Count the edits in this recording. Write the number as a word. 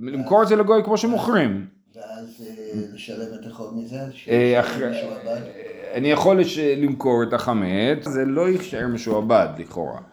one